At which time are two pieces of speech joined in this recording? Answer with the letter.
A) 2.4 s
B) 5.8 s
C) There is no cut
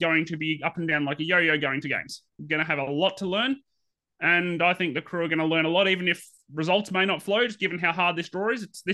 A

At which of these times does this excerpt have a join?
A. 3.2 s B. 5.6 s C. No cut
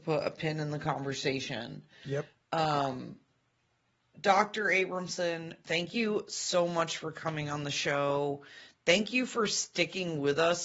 B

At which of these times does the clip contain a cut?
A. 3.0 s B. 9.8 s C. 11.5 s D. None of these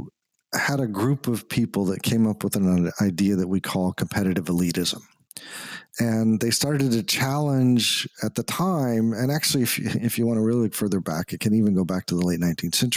D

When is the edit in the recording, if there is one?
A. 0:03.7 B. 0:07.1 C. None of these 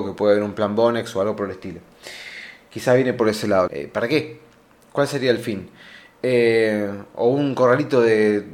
A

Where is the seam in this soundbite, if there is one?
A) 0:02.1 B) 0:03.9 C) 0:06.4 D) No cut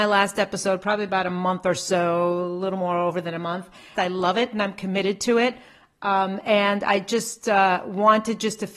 B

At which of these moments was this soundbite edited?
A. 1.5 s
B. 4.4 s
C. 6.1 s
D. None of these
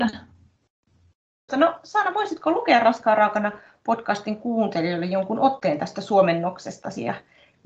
A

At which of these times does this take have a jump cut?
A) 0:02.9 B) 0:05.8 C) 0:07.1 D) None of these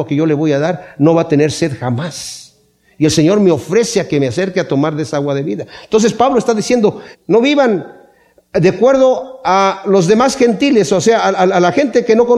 C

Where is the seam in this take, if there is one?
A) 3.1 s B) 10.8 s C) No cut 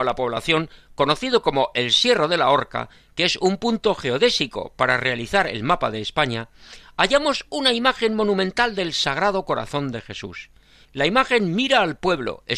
B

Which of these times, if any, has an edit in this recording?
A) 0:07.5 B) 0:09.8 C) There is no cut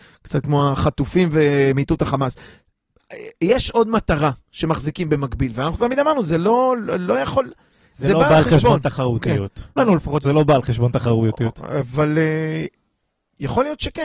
B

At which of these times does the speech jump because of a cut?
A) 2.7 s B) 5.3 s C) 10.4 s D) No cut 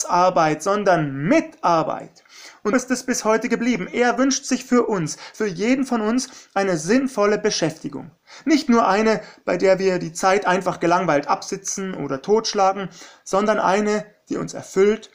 A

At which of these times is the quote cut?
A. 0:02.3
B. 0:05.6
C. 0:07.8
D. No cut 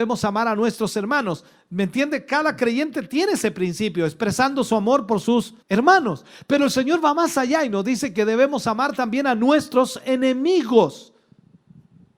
B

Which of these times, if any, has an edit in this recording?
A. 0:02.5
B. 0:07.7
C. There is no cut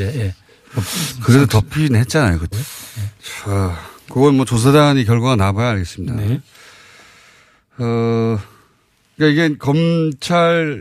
A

